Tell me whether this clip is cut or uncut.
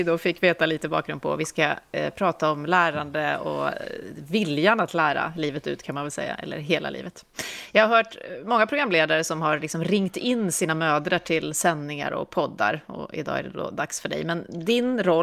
uncut